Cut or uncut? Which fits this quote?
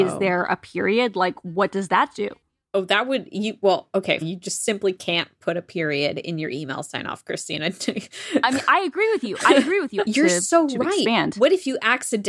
cut